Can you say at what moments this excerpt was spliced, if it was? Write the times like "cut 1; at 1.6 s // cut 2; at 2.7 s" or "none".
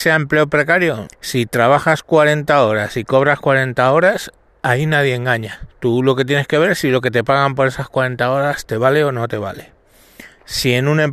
cut 1; at 1.1 s // cut 2; at 5.7 s